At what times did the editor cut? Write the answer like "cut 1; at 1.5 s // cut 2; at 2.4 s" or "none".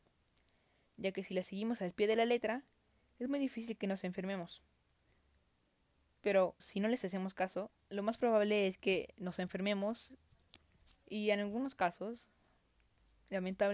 cut 1; at 6.6 s // cut 2; at 7.8 s